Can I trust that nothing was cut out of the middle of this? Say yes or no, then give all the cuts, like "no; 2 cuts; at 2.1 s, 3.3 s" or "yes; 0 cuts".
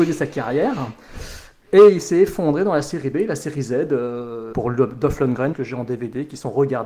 no; 2 cuts; at 4.5 s, 5.5 s